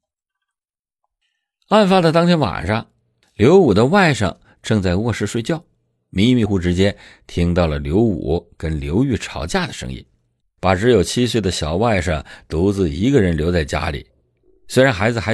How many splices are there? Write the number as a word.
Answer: two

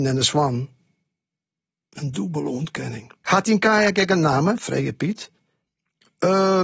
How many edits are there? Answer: one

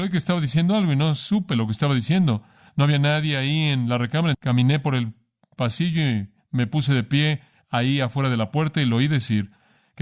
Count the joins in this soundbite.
one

